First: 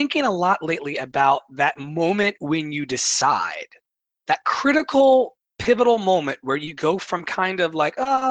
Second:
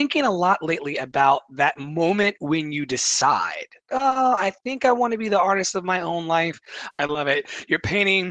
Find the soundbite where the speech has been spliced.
second; 2 cuts; at 3.9 s, 6.9 s

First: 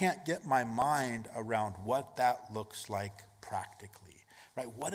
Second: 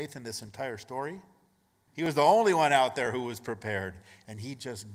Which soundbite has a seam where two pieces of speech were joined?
second; 1 cut; at 1.9 s

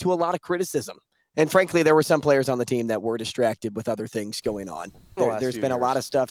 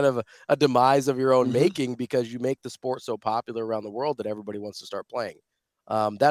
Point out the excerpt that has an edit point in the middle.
first; 2 cuts; at 1.3 s, 5.2 s

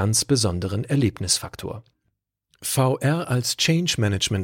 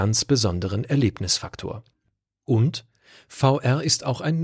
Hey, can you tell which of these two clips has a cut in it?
second; 1 cut; at 2.3 s

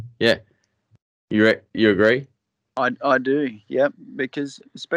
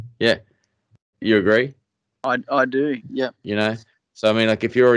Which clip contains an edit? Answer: second; 2 cuts; at 1.1 s, 3.0 s

